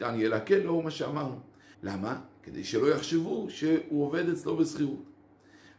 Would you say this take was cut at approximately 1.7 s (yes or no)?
yes